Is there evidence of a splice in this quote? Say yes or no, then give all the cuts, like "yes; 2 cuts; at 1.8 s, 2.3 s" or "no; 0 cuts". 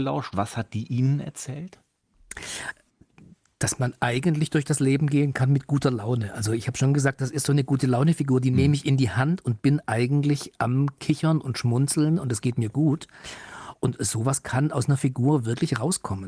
no; 0 cuts